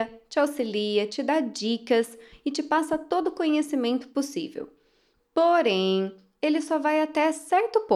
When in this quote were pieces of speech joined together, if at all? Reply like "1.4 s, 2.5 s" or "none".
1.1 s